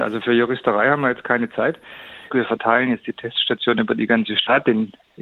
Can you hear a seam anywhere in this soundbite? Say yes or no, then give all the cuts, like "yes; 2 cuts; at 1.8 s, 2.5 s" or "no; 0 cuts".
yes; 1 cut; at 2.3 s